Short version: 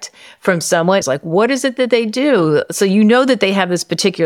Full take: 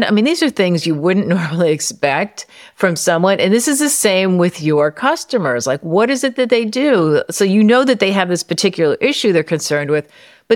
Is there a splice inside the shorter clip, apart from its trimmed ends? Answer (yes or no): yes